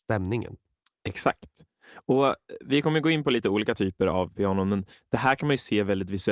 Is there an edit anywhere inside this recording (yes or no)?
no